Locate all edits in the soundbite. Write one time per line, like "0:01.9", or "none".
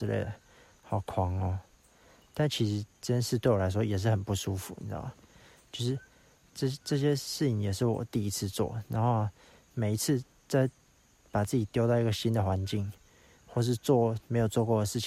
none